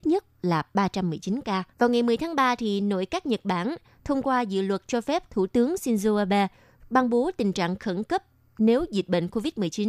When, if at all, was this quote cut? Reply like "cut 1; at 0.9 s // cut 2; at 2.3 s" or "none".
cut 1; at 1.7 s